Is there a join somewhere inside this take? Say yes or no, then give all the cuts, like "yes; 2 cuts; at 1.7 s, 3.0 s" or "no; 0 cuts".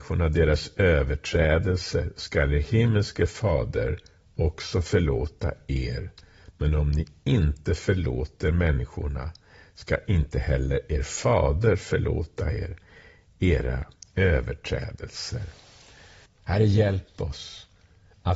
yes; 1 cut; at 16.3 s